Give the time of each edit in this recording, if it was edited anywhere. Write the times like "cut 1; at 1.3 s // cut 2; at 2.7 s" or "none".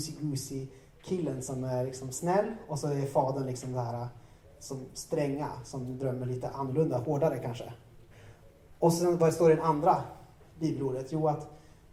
none